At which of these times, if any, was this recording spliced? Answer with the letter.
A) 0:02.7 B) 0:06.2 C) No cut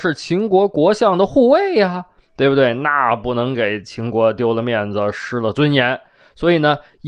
C